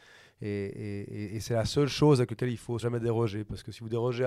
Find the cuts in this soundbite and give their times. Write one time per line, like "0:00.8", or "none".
0:02.8